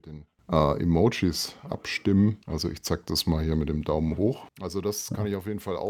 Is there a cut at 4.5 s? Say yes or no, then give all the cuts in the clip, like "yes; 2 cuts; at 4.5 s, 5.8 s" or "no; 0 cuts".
no; 1 cut; at 2.4 s